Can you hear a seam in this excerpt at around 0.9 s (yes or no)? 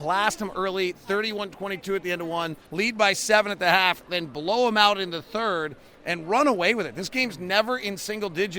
no